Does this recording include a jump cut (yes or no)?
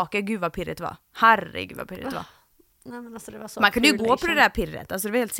no